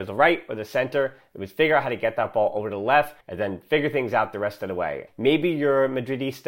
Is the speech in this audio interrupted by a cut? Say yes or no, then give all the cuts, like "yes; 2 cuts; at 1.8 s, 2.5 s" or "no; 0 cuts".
yes; 2 cuts; at 3.2 s, 5.1 s